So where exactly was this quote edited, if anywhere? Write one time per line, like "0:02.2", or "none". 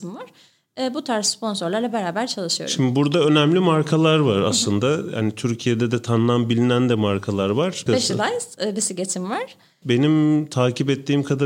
0:07.9
0:09.8